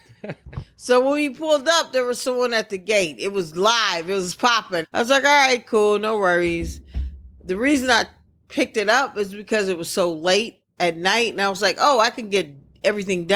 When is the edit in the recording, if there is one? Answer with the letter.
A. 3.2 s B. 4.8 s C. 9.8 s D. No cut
B